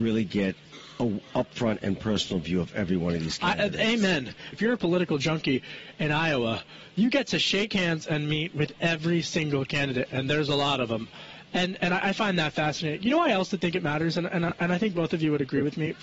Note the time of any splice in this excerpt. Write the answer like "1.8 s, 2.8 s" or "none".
4.5 s

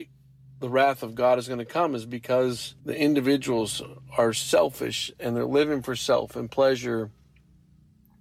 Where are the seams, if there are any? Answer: 2.8 s

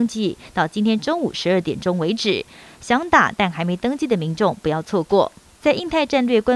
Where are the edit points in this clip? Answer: 5.6 s

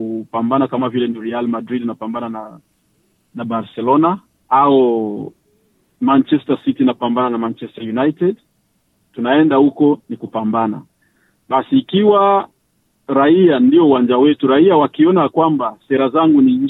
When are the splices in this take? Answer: none

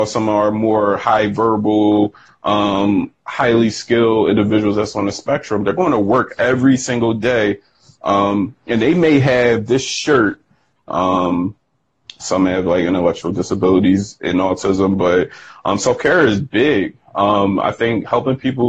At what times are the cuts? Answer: 10.9 s

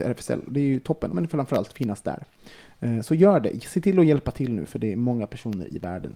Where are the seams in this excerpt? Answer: 1.1 s

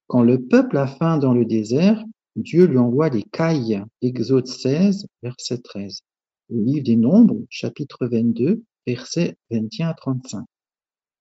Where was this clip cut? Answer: 3.9 s, 6.4 s

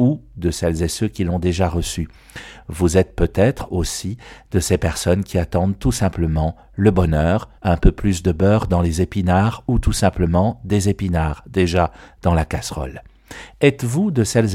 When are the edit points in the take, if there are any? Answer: 2.6 s, 7.6 s

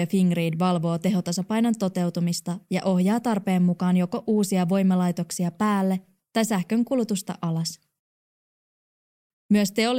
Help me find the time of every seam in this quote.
none

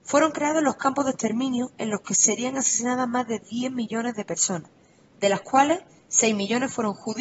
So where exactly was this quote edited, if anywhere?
none

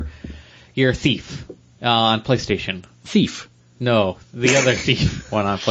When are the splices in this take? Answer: none

